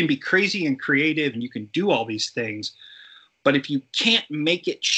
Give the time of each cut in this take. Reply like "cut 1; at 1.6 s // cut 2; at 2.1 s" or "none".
cut 1; at 1.3 s